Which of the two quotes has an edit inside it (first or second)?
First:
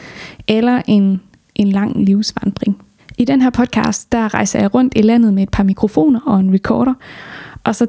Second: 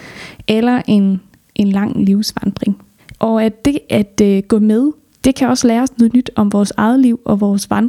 second